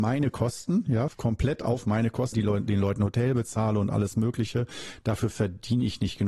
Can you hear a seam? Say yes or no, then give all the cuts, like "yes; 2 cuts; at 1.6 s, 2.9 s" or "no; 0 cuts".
yes; 2 cuts; at 1.1 s, 2.3 s